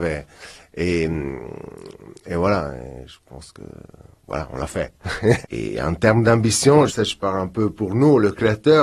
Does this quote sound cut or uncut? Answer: cut